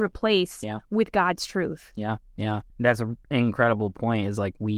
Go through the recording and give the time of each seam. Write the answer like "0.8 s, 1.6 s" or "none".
2.7 s